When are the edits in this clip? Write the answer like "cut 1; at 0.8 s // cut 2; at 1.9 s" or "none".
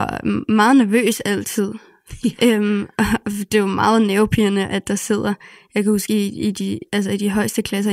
none